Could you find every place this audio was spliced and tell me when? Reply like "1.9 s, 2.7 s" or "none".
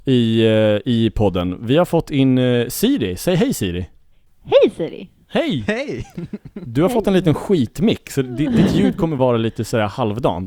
none